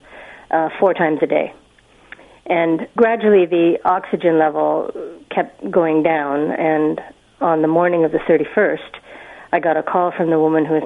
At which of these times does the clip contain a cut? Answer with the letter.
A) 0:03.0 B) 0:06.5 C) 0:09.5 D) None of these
A